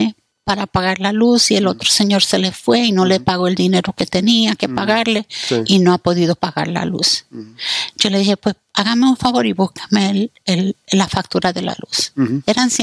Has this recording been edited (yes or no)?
no